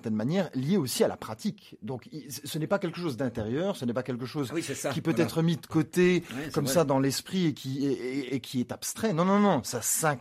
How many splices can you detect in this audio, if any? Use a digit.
1